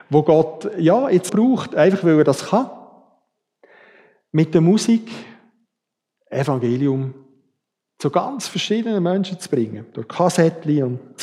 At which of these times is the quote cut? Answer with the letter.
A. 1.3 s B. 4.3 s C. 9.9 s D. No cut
A